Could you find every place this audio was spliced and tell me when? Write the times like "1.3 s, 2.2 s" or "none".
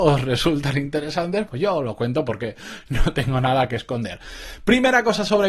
1.5 s